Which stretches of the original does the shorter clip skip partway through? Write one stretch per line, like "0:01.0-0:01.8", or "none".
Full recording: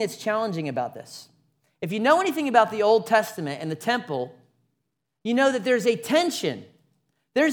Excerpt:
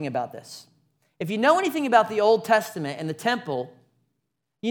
none